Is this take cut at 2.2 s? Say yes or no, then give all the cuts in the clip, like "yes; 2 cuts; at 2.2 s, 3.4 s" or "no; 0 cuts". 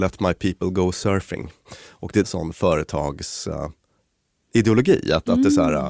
yes; 1 cut; at 2.2 s